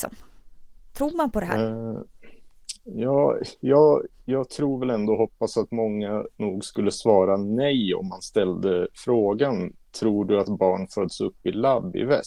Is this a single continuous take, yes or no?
yes